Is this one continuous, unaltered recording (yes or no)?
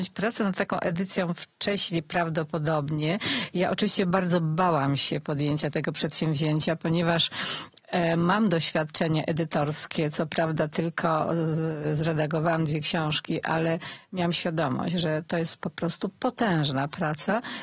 yes